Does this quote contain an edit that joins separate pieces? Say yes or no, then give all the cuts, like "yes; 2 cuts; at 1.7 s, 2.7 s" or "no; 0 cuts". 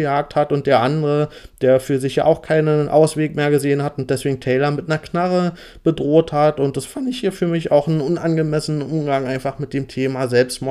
no; 0 cuts